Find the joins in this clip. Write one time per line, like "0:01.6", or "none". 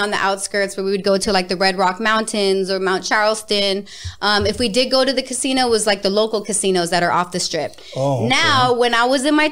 none